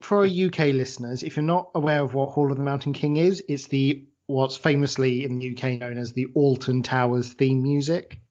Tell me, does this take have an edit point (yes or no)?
no